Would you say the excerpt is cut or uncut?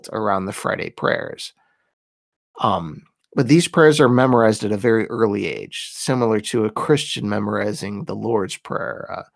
uncut